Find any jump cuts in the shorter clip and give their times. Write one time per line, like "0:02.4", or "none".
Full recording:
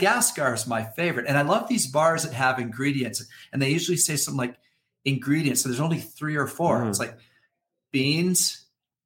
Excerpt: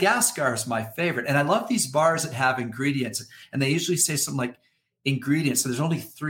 none

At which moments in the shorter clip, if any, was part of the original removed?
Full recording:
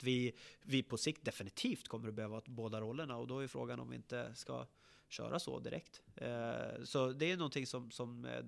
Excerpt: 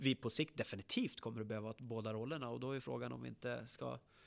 none

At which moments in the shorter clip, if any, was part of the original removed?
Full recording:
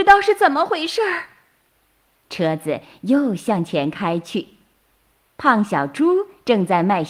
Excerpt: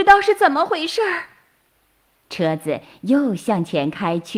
none

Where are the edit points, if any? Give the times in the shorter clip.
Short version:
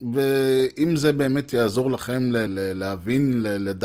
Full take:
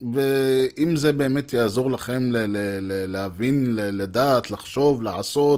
0:02.5

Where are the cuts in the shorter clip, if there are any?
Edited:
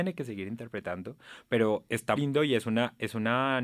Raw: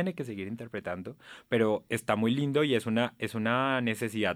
0:02.2

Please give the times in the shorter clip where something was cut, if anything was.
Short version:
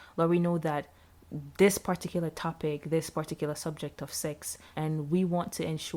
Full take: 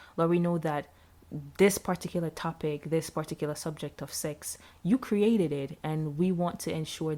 0:04.7

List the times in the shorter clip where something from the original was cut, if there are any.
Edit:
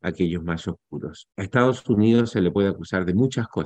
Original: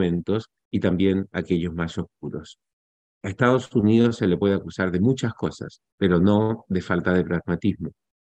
0:01.3

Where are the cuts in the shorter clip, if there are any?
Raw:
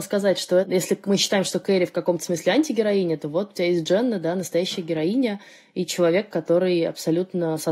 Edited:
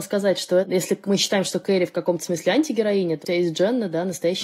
0:03.2

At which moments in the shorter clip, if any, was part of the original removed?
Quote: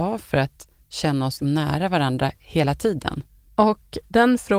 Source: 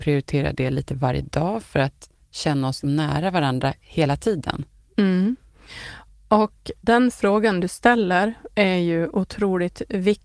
0:03.5

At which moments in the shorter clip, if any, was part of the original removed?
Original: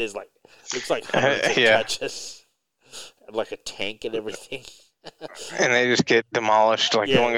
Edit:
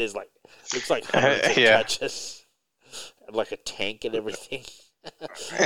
none

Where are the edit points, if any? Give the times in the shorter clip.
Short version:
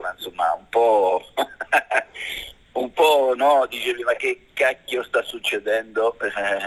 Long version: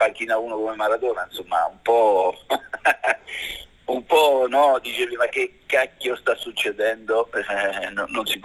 none

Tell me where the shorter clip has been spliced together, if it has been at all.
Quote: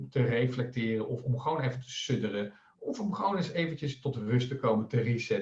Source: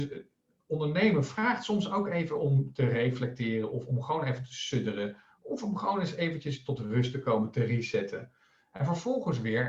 none

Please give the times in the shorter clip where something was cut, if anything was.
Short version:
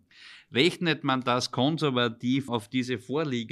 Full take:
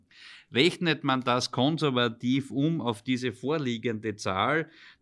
0:02.5

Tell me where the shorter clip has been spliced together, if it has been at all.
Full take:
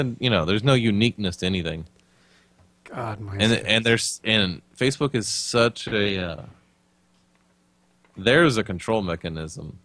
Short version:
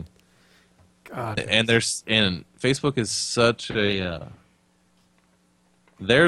0:01.4

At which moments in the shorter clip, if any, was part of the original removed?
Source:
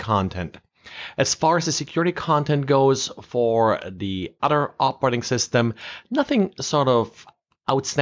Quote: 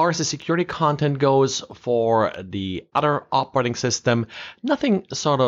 none

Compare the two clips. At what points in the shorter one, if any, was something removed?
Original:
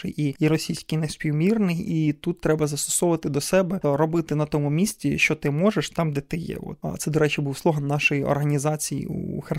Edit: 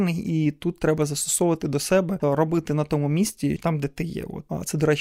0:03.6

